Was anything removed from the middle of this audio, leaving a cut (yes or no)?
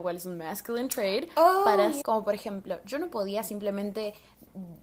yes